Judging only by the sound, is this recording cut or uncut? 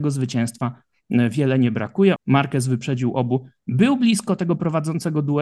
cut